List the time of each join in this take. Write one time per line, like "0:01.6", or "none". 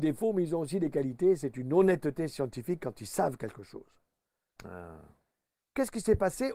0:04.6